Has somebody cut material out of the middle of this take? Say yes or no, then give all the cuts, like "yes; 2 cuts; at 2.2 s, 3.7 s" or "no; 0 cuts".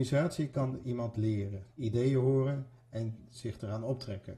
yes; 1 cut; at 1.7 s